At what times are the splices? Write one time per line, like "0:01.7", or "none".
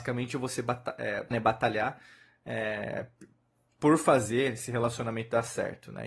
0:01.3